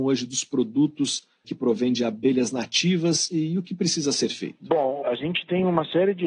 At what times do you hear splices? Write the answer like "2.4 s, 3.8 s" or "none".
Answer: 1.4 s, 5.0 s